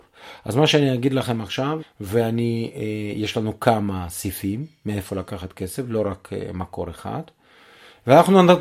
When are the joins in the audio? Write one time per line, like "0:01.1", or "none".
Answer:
0:01.8